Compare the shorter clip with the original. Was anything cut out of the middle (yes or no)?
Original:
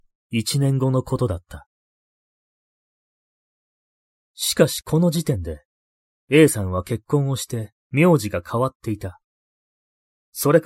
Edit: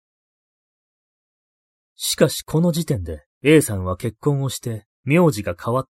yes